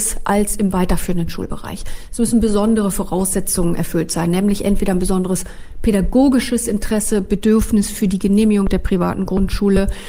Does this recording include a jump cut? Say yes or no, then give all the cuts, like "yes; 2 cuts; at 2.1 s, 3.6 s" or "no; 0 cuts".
no; 0 cuts